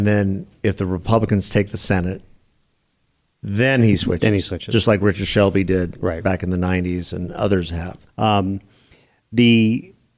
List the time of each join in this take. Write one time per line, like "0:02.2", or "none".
0:08.1